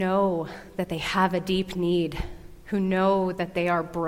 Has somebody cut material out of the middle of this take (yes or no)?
no